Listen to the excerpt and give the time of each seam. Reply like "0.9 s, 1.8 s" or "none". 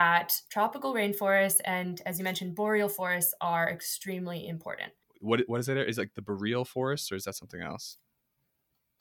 5.0 s